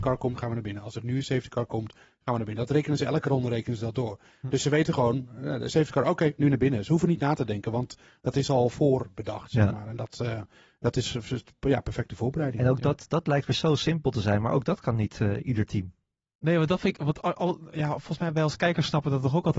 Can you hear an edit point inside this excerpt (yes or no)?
no